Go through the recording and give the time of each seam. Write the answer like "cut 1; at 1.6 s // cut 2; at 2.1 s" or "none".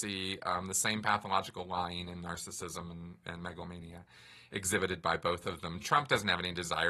none